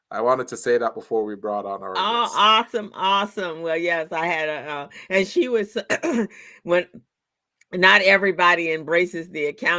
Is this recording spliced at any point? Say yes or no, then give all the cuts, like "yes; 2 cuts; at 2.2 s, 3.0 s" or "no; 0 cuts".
no; 0 cuts